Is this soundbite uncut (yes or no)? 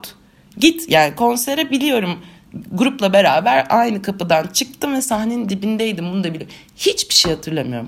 yes